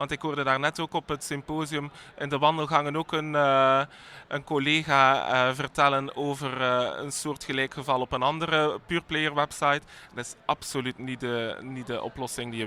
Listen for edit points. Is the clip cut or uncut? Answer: uncut